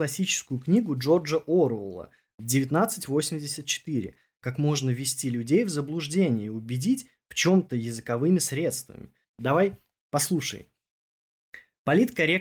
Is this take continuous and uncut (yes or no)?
no